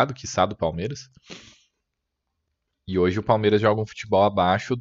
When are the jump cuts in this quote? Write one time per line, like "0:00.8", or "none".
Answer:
none